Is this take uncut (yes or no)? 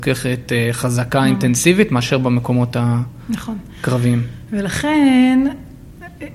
yes